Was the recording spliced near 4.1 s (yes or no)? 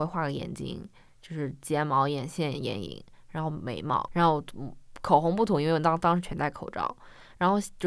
yes